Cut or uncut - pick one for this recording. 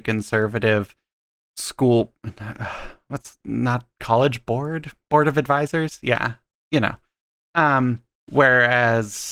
uncut